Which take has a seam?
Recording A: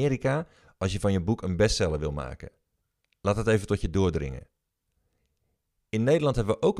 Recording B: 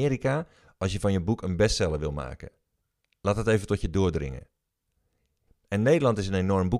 B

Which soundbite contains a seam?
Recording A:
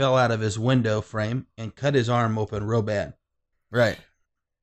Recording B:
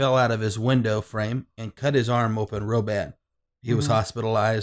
A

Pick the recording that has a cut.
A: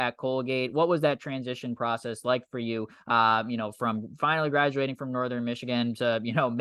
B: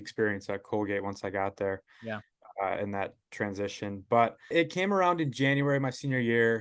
B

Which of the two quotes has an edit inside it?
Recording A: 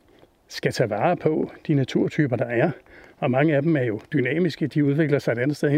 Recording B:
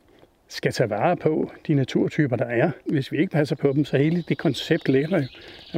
B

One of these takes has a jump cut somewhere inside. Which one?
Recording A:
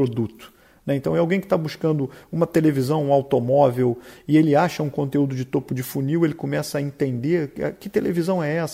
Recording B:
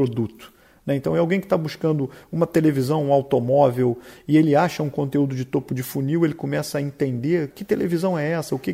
B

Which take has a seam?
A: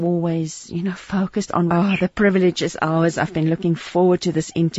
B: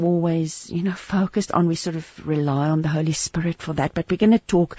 A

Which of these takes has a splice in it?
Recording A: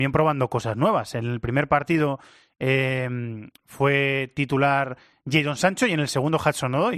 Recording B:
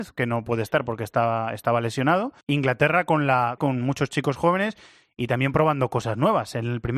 B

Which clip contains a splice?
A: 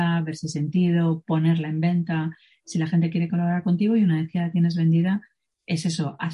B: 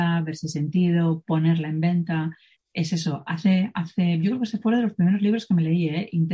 B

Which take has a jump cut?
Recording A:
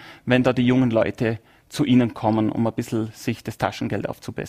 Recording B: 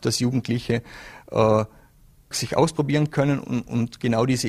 B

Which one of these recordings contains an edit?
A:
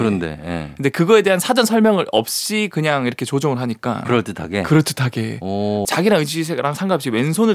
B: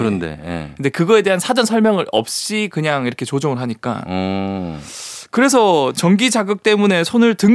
A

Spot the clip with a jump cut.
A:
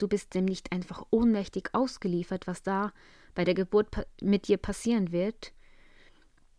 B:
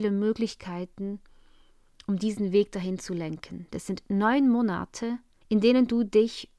B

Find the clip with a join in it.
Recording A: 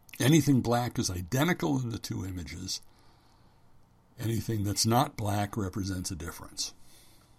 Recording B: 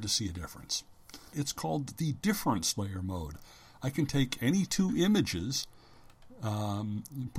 B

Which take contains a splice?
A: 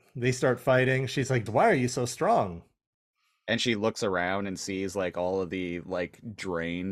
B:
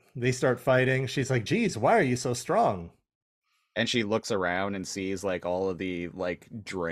A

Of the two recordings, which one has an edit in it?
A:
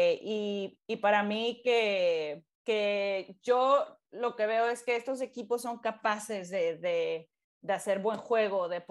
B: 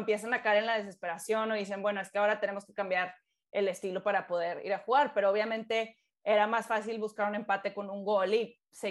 A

